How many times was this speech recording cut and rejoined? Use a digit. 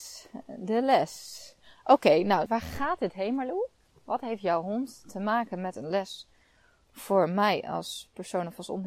1